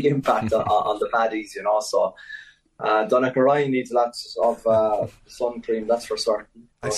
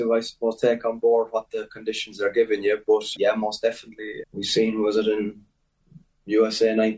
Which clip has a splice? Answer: second; 2 cuts; at 3.1 s, 4.2 s

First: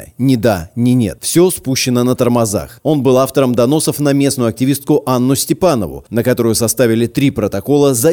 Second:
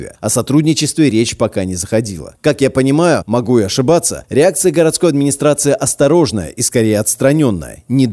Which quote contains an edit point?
first; 1 cut; at 2.8 s

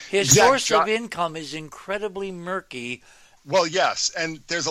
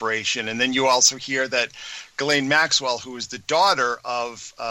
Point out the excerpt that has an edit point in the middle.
first; 1 cut; at 3.4 s

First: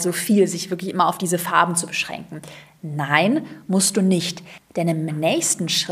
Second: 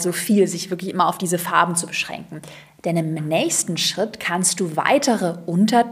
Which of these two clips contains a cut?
second; 1 cut; at 2.7 s

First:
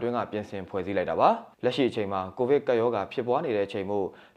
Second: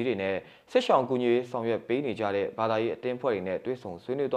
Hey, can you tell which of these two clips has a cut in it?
first; 1 cut; at 1.5 s

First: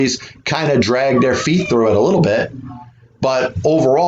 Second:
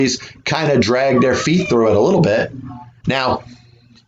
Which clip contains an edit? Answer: second; 1 cut; at 3.0 s

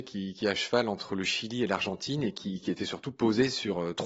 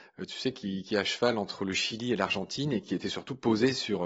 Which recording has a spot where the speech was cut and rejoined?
second; 1 cut; at 2.8 s

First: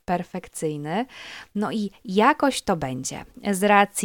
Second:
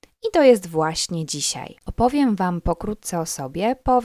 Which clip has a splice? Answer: second; 1 cut; at 1.8 s

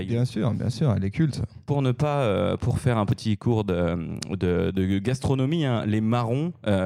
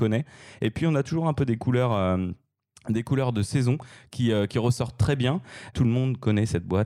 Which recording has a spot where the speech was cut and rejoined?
second; 1 cut; at 5.7 s

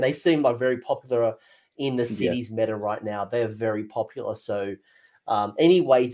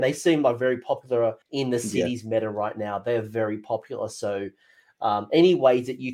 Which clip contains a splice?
second; 1 cut; at 1.4 s

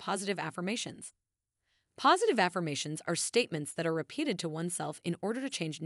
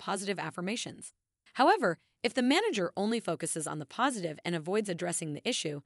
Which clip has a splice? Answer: second; 1 cut; at 1.5 s

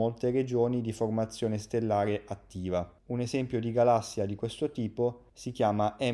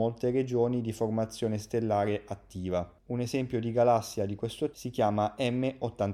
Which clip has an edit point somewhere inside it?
second; 1 cut; at 4.7 s

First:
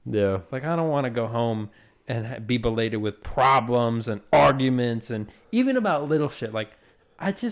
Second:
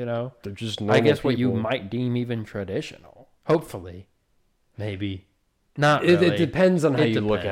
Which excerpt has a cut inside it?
second; 1 cut; at 3.4 s

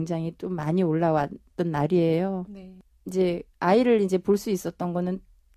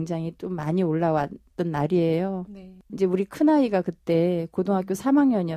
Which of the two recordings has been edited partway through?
second; 1 cut; at 2.9 s

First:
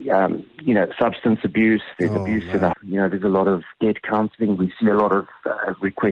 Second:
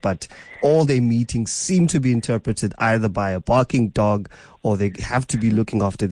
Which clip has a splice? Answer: first; 1 cut; at 2.7 s

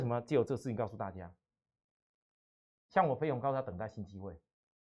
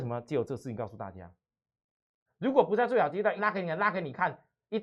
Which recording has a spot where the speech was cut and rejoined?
second; 2 cuts; at 2.3 s, 3.4 s

